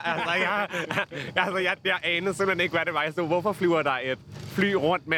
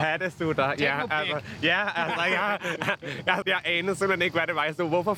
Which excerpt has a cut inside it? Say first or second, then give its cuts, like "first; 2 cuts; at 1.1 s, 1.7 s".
second; 1 cut; at 3.4 s